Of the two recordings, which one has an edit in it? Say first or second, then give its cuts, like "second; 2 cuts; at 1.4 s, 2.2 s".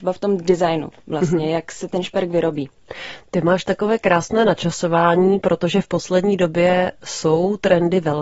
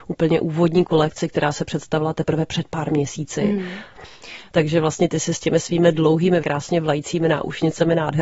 second; 2 cuts; at 4.5 s, 6.4 s